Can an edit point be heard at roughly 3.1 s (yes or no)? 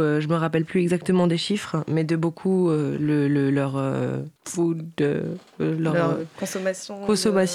no